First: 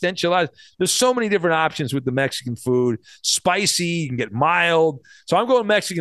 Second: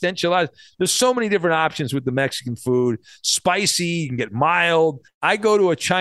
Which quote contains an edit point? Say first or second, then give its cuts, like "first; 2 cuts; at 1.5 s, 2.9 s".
second; 1 cut; at 5.1 s